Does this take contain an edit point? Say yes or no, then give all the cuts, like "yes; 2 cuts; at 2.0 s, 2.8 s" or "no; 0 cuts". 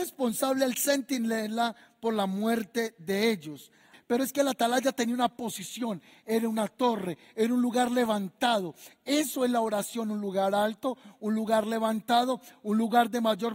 yes; 1 cut; at 3.9 s